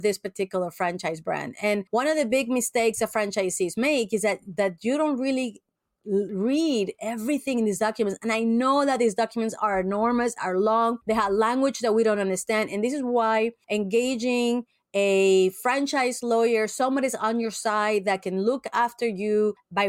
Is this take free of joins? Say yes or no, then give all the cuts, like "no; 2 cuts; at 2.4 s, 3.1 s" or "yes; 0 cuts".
yes; 0 cuts